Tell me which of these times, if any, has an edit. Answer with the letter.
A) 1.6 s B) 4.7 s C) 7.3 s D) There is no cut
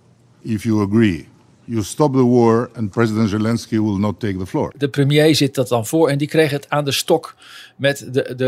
B